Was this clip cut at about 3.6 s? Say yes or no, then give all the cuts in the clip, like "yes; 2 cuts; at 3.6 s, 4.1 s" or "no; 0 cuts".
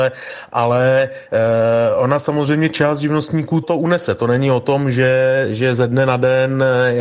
yes; 1 cut; at 3.6 s